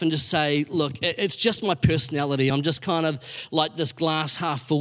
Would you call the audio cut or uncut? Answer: uncut